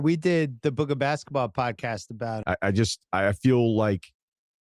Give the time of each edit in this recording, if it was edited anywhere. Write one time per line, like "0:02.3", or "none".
0:02.4